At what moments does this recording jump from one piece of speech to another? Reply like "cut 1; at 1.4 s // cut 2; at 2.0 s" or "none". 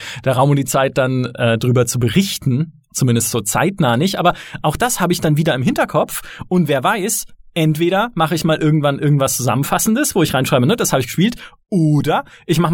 none